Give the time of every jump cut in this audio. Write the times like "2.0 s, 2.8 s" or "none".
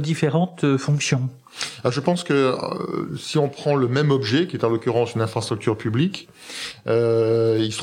none

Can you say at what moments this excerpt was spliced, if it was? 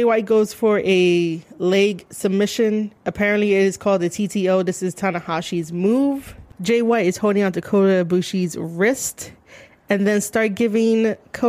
6.5 s

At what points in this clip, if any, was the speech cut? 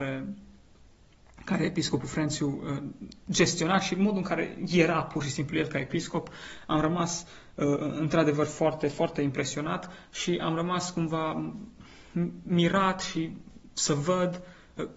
none

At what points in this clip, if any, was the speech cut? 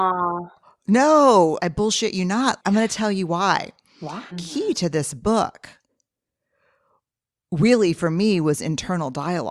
2.6 s, 4.3 s

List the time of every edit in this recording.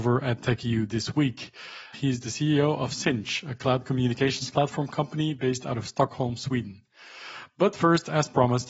1.9 s

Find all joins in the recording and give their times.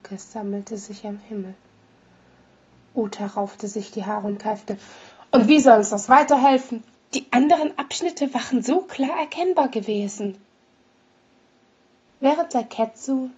7.0 s, 12.1 s

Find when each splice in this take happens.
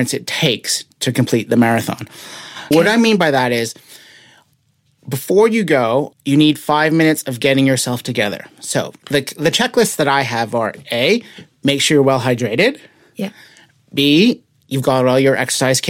2.7 s, 6.1 s

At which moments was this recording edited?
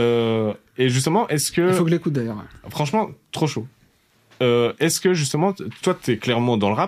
5.8 s

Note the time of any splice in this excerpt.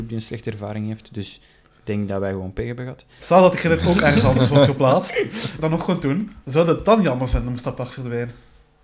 3.2 s, 5.6 s

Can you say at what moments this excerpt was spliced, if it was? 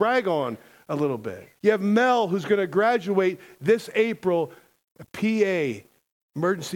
1.6 s

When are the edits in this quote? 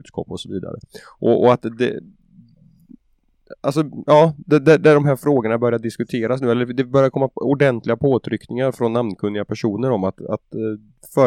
none

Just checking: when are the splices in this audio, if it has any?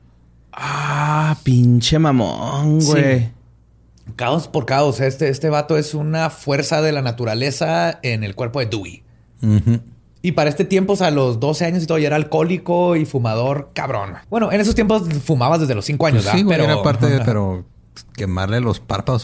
14.2 s, 17.2 s

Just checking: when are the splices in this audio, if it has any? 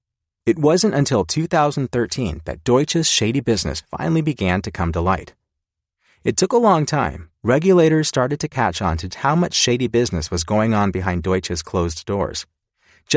7.3 s, 9.1 s

